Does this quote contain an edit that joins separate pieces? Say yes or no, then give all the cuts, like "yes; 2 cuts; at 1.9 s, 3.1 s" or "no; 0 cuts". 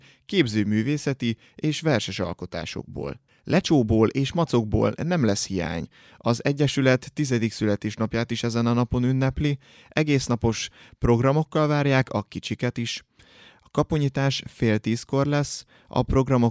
yes; 1 cut; at 3.3 s